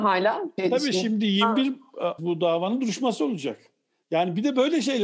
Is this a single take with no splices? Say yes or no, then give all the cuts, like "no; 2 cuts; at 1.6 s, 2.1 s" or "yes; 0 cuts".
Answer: no; 1 cut; at 2.2 s